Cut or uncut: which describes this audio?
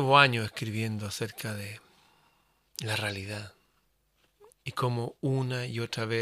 cut